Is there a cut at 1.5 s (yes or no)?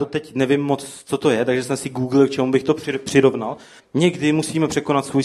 no